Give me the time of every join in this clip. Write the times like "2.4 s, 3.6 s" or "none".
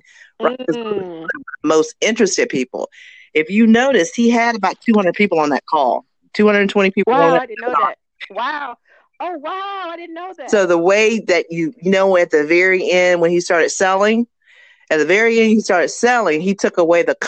none